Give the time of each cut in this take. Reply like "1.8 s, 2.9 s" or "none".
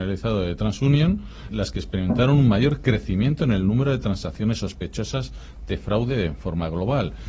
1.5 s